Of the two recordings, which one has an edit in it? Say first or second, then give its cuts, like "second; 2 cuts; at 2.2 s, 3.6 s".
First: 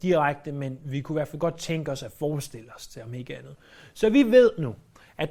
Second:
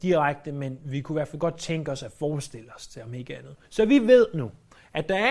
second; 1 cut; at 3.6 s